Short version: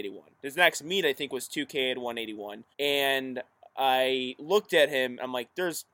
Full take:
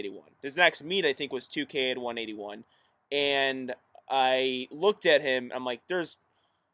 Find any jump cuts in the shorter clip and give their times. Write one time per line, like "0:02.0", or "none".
0:02.7